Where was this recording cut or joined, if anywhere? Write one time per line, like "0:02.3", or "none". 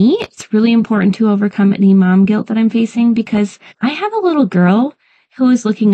0:03.7